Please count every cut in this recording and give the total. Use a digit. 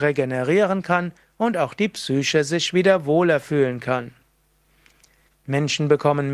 1